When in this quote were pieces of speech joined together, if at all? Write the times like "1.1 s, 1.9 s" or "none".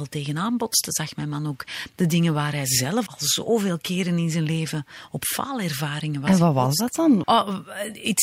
3.1 s, 7.2 s